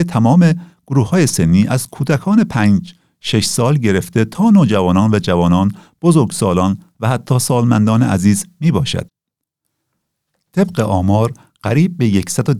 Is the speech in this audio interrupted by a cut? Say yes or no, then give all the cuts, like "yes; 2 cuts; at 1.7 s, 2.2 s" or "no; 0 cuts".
no; 0 cuts